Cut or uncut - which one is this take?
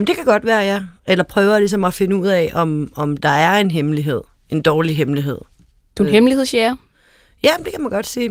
uncut